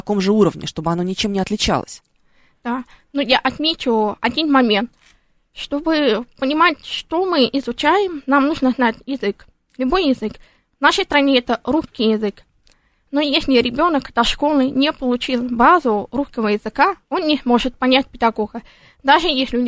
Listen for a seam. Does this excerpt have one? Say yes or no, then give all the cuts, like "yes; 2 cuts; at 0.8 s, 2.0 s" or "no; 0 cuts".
no; 0 cuts